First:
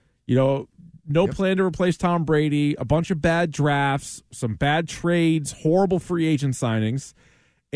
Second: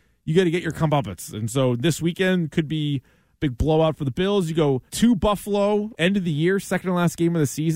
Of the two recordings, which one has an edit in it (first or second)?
second